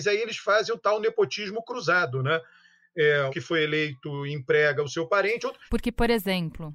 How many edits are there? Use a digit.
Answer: 2